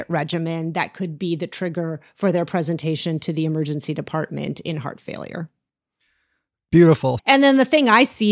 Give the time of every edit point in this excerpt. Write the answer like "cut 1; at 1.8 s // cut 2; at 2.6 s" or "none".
cut 1; at 7.2 s